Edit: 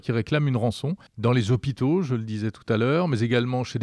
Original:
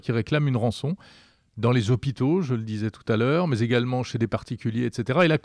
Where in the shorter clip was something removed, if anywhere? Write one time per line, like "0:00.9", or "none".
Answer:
0:01.1